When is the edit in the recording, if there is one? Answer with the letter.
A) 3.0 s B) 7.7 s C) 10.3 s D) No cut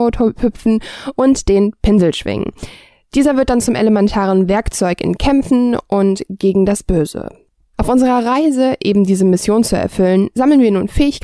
B